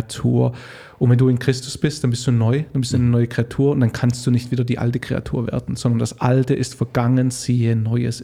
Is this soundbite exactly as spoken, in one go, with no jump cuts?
yes; 0 cuts

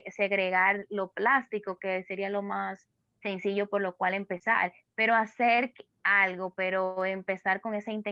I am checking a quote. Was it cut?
no; 0 cuts

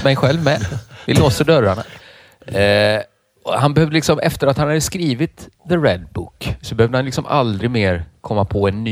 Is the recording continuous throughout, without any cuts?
no; 1 cut; at 2.0 s

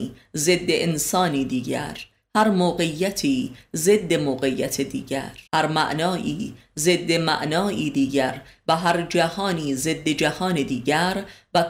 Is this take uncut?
no; 1 cut; at 5.5 s

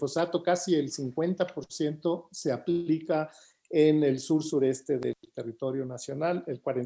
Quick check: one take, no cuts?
yes; 0 cuts

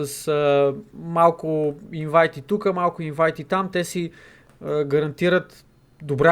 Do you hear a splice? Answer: no; 0 cuts

